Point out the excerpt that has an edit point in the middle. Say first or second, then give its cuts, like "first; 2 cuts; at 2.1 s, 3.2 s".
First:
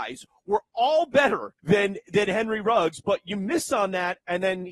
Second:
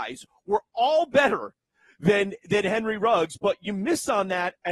first; 1 cut; at 1.6 s